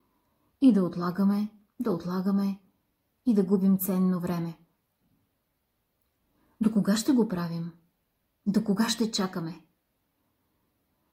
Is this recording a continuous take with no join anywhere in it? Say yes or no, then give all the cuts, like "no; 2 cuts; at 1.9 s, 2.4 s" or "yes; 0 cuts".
yes; 0 cuts